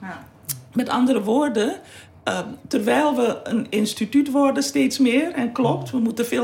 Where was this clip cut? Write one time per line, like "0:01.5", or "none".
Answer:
none